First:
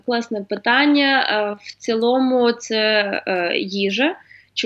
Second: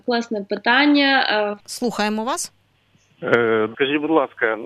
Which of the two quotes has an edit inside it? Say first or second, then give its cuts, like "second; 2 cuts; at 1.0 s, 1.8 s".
second; 2 cuts; at 1.6 s, 3.7 s